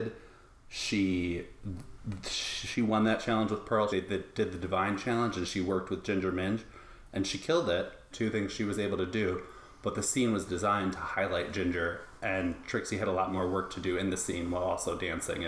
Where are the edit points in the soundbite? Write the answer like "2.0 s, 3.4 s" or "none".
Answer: 3.9 s, 8.1 s